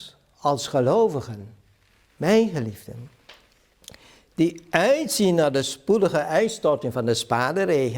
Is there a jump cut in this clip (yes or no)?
no